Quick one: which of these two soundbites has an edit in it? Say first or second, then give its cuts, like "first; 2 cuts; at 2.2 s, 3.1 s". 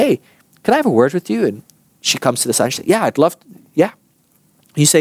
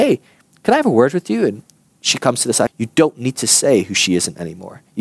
second; 1 cut; at 2.7 s